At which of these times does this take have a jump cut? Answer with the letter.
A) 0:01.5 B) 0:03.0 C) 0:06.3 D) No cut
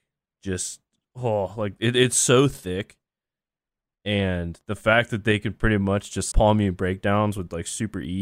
C